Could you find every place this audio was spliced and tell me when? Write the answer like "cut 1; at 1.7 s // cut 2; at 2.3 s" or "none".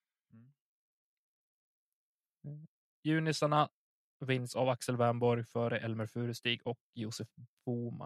none